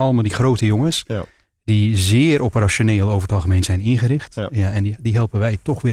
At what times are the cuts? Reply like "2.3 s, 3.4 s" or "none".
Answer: none